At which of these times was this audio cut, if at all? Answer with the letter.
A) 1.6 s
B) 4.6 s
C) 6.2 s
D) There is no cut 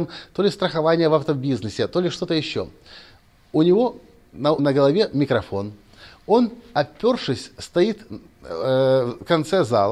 B